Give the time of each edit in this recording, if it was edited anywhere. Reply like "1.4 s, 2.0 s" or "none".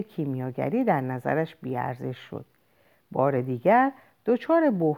none